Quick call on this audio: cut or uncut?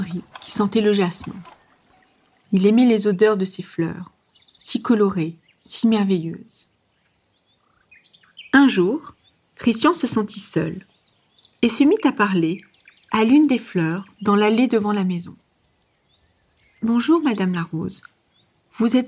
uncut